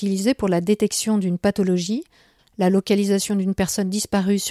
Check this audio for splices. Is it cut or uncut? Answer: cut